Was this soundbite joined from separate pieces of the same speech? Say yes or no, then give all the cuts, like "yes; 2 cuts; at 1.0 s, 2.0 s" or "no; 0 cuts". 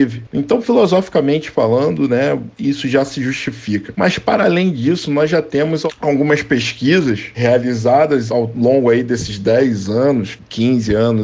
no; 0 cuts